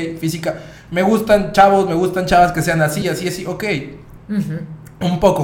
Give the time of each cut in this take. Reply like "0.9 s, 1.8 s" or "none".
3.0 s, 4.2 s